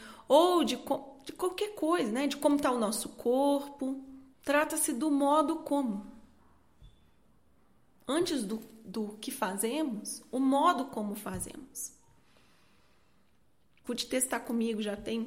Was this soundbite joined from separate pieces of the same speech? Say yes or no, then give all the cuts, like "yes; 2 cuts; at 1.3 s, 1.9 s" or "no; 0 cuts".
yes; 2 cuts; at 4.3 s, 13.8 s